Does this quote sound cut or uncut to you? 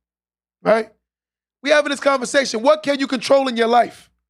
uncut